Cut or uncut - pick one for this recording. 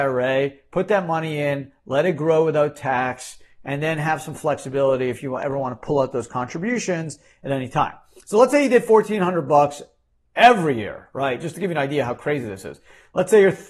uncut